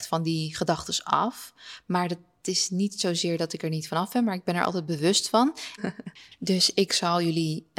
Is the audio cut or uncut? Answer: cut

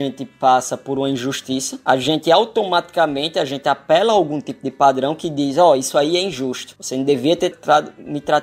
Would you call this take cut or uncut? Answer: cut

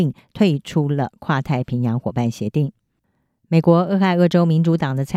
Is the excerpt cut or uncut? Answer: uncut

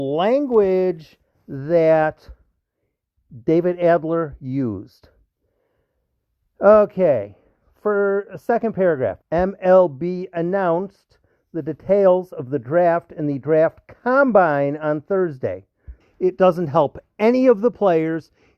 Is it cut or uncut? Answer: cut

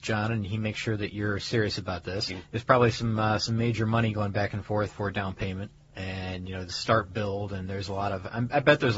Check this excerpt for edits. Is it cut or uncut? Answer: cut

